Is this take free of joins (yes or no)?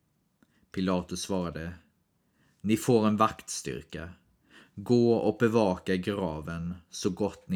yes